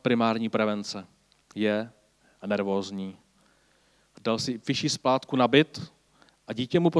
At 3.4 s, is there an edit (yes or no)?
no